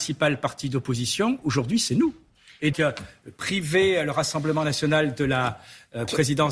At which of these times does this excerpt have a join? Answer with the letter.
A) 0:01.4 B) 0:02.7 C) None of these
B